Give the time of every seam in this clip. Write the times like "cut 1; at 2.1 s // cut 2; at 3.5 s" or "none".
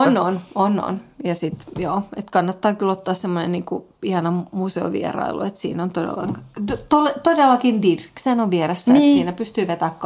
none